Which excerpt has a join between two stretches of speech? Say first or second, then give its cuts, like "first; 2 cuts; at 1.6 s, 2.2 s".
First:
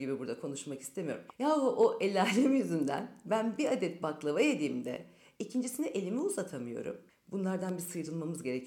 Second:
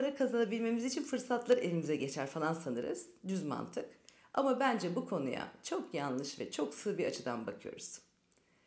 first; 2 cuts; at 1.3 s, 7.1 s